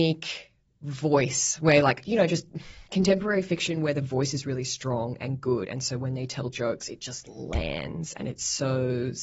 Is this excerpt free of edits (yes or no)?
yes